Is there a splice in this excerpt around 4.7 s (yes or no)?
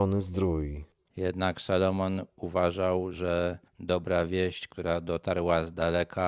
no